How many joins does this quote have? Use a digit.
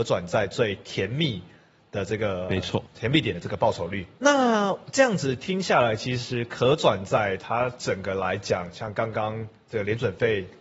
1